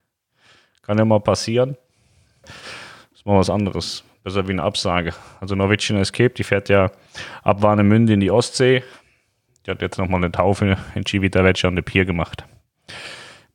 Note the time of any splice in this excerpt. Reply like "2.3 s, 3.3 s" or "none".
2.4 s